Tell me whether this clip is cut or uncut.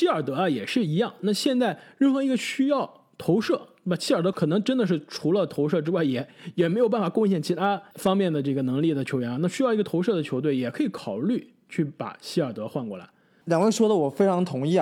uncut